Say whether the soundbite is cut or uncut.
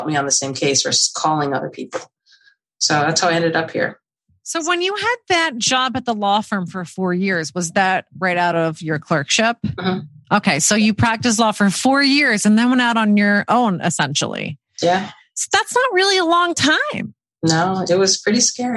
uncut